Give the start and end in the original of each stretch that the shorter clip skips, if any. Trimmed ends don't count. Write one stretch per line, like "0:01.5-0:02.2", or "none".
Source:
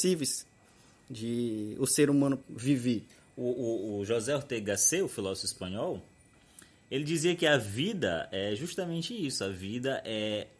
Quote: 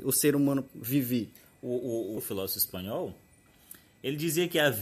0:03.9-0:05.0